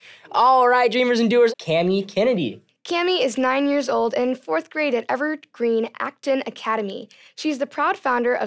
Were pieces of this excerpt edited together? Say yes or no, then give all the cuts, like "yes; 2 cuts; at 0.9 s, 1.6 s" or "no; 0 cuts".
yes; 1 cut; at 1.5 s